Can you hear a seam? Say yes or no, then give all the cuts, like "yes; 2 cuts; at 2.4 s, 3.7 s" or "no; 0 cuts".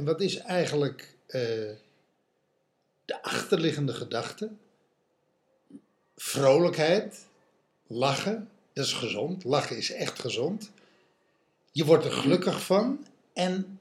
no; 0 cuts